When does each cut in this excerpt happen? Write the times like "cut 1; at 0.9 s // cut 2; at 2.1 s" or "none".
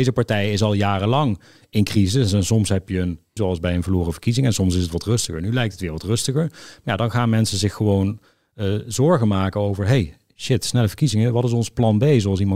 cut 1; at 3.4 s